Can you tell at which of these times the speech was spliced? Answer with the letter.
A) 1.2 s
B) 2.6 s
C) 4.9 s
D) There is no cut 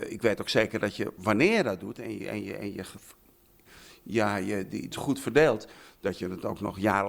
C